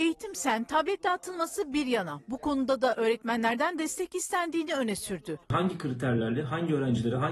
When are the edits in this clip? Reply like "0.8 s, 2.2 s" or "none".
5.4 s